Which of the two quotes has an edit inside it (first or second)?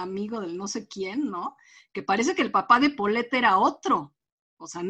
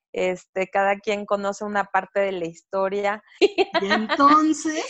second